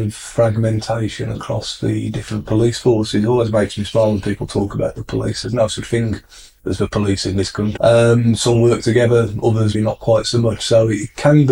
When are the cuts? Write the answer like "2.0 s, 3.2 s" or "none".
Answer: 7.8 s, 9.7 s